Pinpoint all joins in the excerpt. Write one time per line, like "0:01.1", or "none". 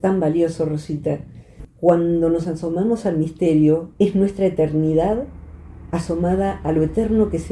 0:03.9